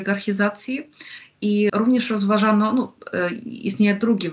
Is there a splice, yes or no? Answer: yes